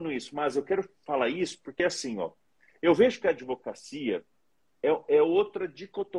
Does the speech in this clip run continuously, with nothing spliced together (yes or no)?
yes